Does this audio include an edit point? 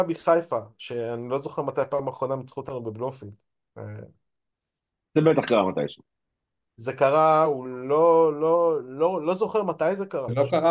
no; 0 cuts

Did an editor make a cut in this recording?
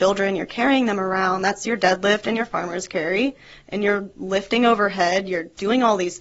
no; 0 cuts

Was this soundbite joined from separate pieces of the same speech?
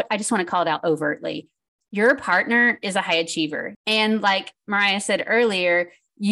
yes; 1 cut; at 3.7 s

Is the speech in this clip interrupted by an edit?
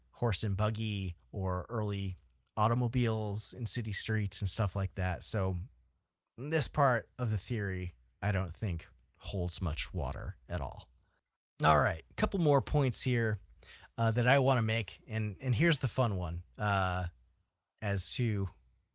no; 0 cuts

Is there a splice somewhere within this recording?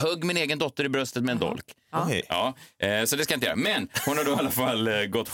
no; 0 cuts

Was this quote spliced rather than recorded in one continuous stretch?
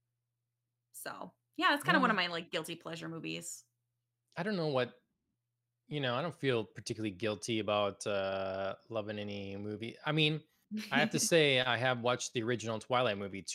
no; 0 cuts

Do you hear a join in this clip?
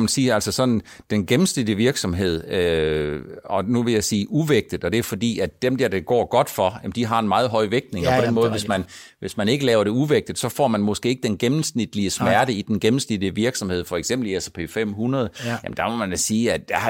no; 0 cuts

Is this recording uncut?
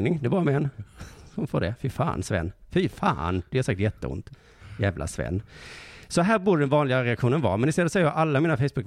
yes; 0 cuts

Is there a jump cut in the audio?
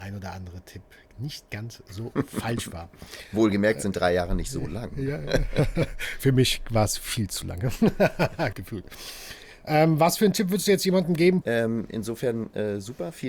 yes; 2 cuts; at 8.5 s, 11.4 s

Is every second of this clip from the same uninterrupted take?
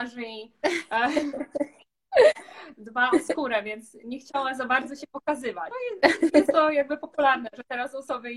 yes; 0 cuts

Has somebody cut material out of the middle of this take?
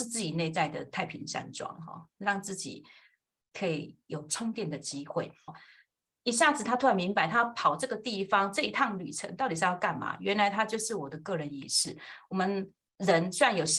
yes; 1 cut; at 5.5 s

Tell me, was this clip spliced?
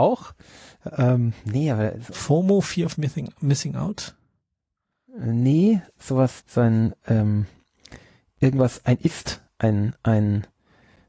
yes; 1 cut; at 6.4 s

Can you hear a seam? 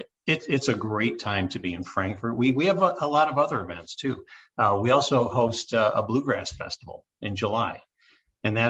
no; 0 cuts

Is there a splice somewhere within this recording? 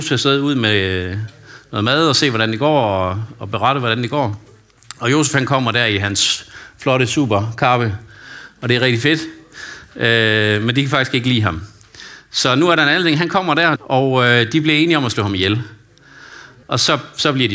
yes; 2 cuts; at 13.8 s, 16.6 s

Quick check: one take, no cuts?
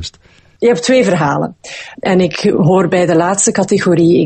no; 1 cut; at 1.9 s

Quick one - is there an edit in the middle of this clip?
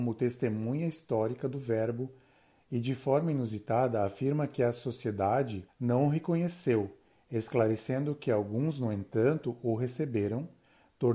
no; 0 cuts

